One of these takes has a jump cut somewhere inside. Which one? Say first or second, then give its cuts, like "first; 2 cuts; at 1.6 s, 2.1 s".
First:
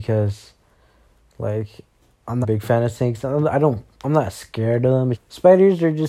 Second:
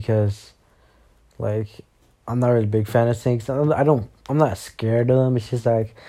first; 2 cuts; at 2.4 s, 5.1 s